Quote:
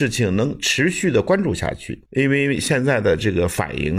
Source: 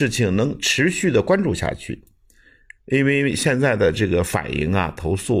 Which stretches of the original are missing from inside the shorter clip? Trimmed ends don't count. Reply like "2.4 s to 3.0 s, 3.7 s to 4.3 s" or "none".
2.1 s to 2.8 s